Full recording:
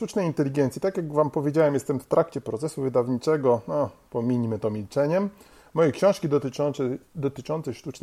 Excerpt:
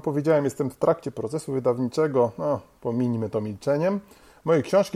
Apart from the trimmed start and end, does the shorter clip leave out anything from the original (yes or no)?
no